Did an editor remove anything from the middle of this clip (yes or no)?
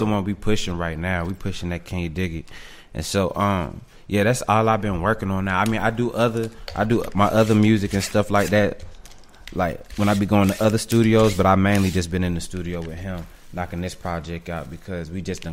no